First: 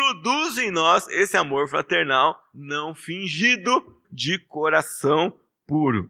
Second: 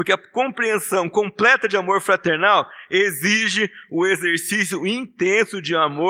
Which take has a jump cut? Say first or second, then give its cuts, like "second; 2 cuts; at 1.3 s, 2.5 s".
first; 1 cut; at 4.0 s